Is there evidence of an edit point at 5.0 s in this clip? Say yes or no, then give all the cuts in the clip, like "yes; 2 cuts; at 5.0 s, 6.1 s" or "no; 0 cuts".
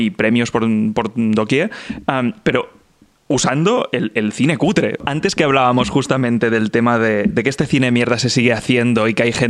yes; 2 cuts; at 5.0 s, 7.3 s